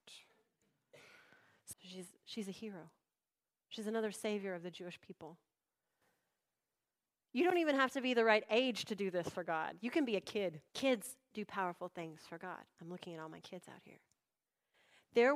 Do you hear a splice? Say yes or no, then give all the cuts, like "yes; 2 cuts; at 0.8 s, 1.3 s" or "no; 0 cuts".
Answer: yes; 2 cuts; at 1.7 s, 10.7 s